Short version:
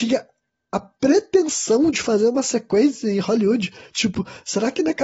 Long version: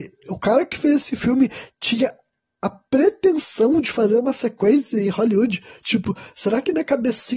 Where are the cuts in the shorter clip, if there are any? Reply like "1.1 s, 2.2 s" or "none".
none